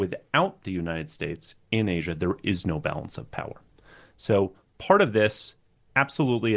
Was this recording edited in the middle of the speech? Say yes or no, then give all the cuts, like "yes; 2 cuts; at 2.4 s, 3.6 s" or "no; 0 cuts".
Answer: no; 0 cuts